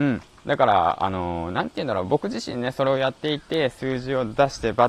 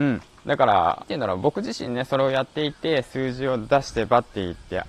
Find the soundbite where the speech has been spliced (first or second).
second